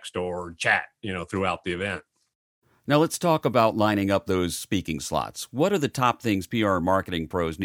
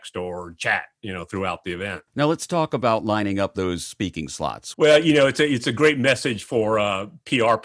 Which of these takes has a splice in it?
second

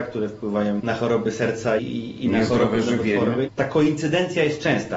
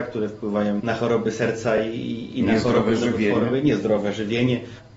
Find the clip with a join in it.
first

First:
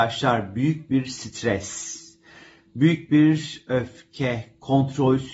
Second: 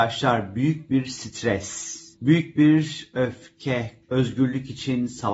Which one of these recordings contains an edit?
second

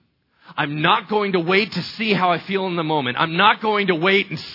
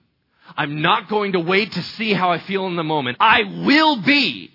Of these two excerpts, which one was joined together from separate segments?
second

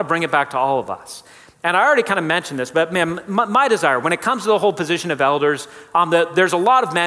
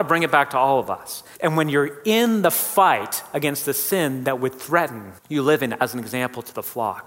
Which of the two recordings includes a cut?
second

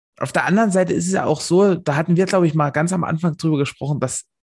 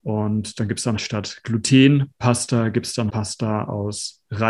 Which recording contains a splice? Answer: second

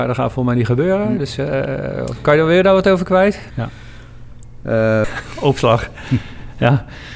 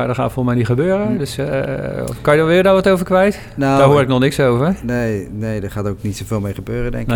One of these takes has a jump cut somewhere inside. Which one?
first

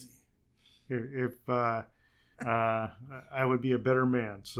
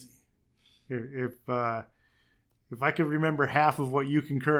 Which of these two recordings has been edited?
first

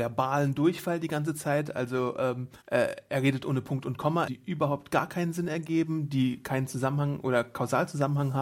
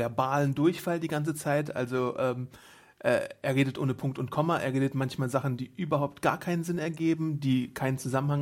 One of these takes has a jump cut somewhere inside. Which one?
first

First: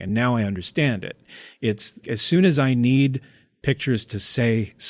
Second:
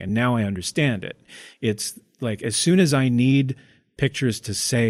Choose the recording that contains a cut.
first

